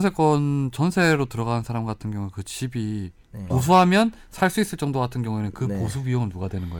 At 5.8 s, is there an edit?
no; 1 cut; at 3.5 s

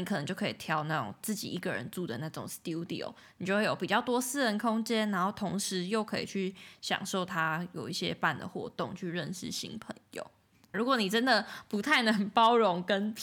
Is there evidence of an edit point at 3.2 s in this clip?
no; 1 cut; at 10.7 s

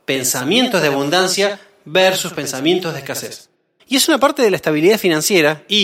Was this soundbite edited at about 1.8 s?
no; 1 cut; at 3.8 s

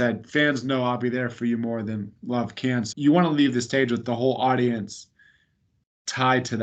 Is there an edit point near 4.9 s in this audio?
no; 1 cut; at 2.9 s

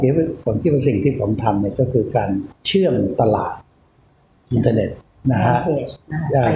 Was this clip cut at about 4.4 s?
no; 1 cut; at 2.6 s

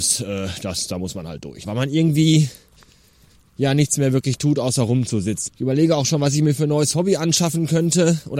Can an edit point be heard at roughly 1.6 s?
yes; 2 cuts; at 1.6 s, 5.5 s

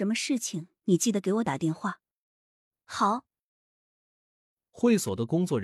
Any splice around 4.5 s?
no; 0 cuts

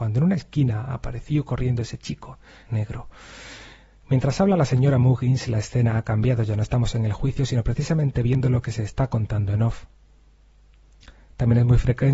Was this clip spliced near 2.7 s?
yes; 1 cut; at 2.7 s

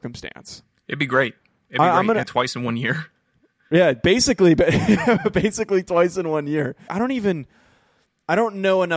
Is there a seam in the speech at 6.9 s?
yes; 2 cuts; at 2.2 s, 6.9 s

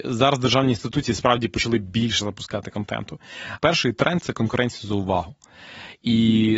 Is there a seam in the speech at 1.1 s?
no; 1 cut; at 3.6 s

